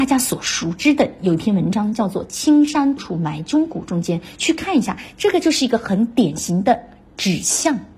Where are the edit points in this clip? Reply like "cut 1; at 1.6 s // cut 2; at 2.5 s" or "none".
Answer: cut 1; at 3.0 s